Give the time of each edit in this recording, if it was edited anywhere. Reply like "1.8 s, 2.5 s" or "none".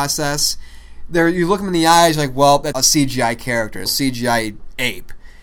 2.7 s, 3.9 s